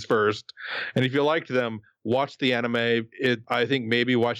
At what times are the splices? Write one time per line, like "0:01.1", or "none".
0:03.4